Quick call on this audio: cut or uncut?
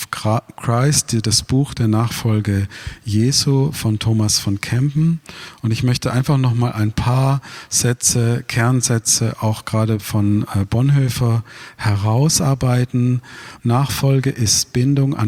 cut